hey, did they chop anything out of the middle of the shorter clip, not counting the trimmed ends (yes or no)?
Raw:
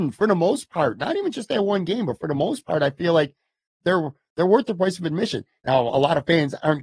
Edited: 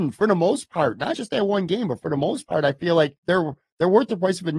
yes